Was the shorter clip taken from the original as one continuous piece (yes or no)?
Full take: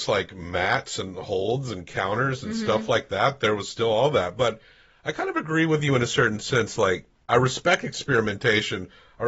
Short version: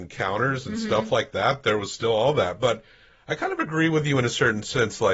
yes